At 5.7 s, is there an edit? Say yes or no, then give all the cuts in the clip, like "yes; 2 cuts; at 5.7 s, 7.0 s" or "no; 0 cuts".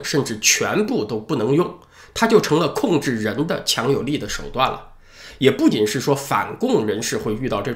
yes; 1 cut; at 5.7 s